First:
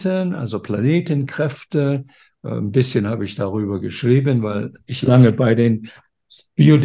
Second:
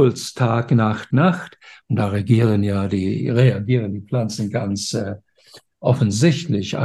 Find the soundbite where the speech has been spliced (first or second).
second